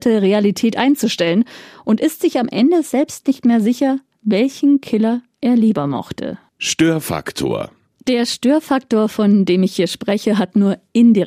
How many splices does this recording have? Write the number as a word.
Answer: zero